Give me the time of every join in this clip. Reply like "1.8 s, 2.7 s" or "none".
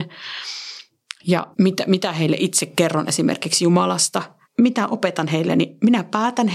1.5 s, 4.4 s